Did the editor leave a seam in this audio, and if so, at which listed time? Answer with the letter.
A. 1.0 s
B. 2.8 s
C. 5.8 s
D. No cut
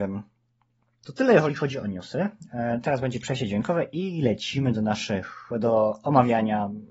A